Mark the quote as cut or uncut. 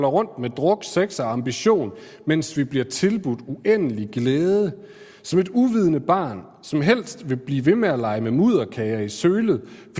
uncut